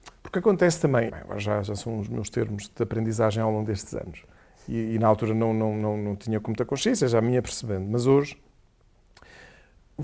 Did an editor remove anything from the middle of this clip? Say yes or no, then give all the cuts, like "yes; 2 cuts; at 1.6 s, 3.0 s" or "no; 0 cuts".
yes; 1 cut; at 1.1 s